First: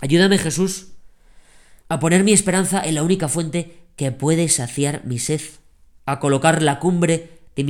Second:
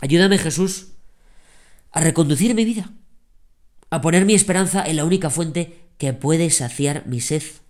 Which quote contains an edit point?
first; 1 cut; at 1.8 s

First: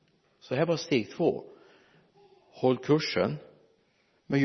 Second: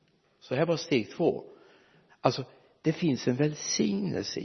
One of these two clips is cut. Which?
second; 1 cut; at 2.1 s

